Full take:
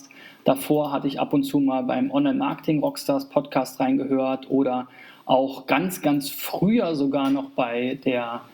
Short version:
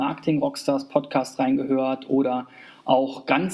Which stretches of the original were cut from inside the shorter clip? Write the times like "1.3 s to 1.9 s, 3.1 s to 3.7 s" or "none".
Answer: none